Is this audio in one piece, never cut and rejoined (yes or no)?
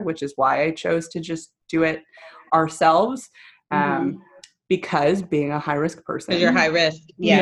yes